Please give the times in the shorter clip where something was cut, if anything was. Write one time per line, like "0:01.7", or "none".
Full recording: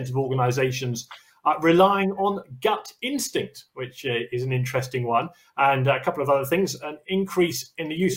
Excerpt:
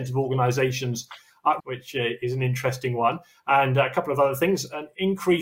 0:01.6

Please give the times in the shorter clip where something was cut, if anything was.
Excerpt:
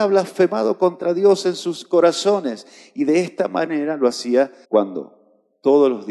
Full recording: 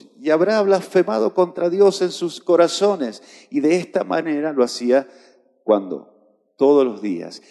0:04.6

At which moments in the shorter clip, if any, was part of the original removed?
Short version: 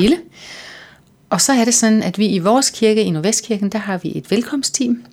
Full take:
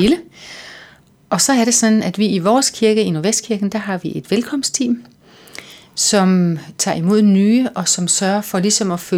none

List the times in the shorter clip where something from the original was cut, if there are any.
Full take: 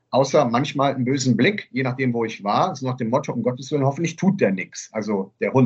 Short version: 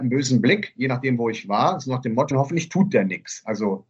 0:02.3

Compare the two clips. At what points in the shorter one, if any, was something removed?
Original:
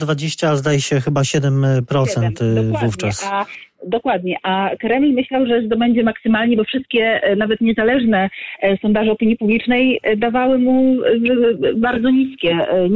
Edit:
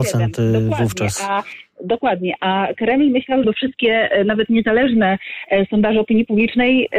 0:03.4

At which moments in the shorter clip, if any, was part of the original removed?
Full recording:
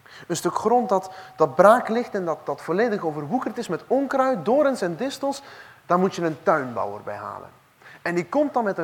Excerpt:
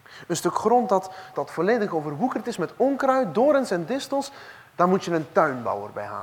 0:01.3

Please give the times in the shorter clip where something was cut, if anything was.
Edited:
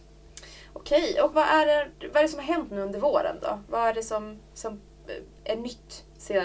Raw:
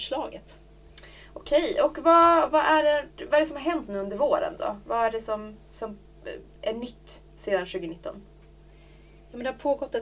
0:01.3

